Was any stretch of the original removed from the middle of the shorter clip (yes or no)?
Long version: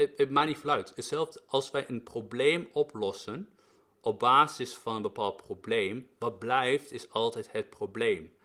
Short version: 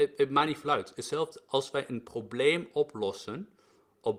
no